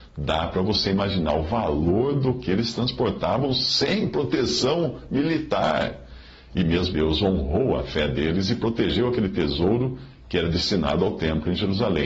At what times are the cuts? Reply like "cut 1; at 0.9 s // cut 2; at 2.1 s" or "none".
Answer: cut 1; at 6.9 s